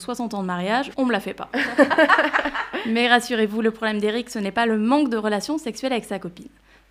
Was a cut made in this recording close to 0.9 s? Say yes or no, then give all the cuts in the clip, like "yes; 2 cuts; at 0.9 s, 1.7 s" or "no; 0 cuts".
yes; 1 cut; at 0.9 s